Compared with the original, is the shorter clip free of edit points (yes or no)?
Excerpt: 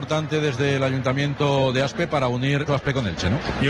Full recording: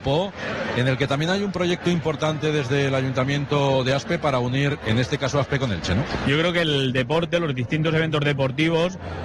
no